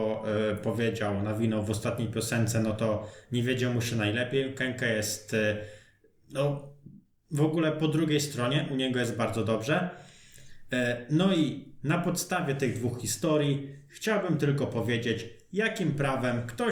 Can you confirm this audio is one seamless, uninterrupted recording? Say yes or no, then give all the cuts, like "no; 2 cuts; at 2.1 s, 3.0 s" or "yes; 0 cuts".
yes; 0 cuts